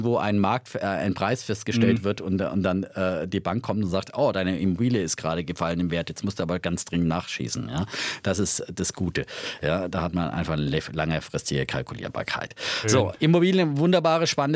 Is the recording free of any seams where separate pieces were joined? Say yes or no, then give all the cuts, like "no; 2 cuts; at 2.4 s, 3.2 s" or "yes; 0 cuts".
yes; 0 cuts